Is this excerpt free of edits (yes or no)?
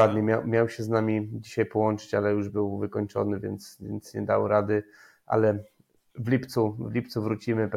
yes